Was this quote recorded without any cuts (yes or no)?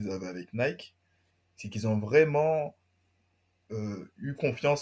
yes